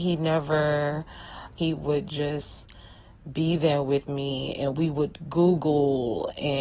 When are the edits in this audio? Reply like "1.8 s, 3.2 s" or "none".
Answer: 1.6 s